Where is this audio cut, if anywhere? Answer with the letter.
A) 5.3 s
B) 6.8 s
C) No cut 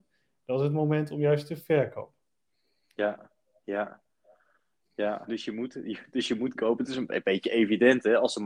A